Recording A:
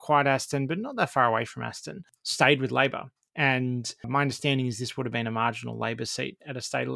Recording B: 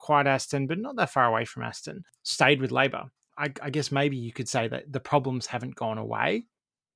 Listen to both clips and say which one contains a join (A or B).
B